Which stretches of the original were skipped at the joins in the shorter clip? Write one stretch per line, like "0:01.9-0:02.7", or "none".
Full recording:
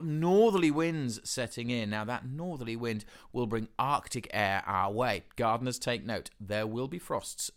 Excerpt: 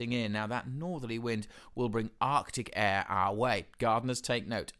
none